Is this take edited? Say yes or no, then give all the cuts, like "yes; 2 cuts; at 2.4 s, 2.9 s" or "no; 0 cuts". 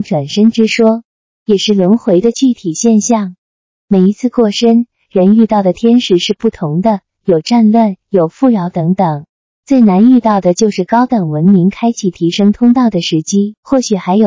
no; 0 cuts